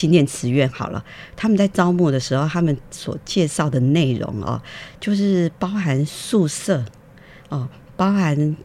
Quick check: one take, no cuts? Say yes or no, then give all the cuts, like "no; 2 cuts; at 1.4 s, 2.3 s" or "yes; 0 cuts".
yes; 0 cuts